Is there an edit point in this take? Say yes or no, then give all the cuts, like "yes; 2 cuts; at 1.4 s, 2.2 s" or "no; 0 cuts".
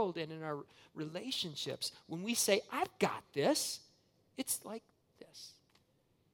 no; 0 cuts